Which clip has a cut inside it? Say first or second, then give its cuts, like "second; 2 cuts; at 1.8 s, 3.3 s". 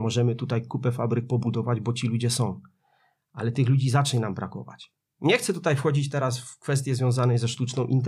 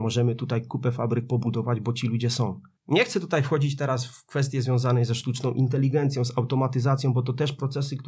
second; 1 cut; at 2.8 s